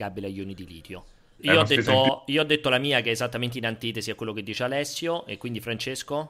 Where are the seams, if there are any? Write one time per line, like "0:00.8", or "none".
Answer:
0:01.4